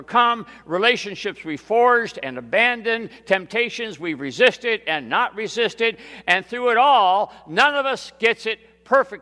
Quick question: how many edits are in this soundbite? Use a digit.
0